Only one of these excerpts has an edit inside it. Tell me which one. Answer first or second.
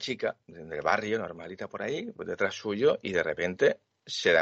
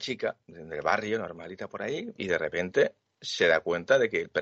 second